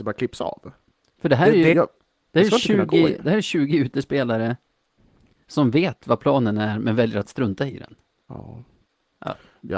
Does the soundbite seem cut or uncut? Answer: cut